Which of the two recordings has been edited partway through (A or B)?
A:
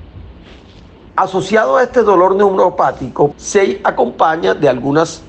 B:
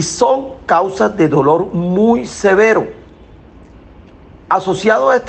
A